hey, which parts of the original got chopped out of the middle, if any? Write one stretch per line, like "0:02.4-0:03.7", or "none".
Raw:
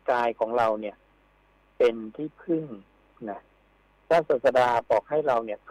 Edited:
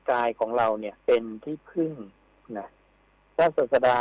0:01.0-0:01.7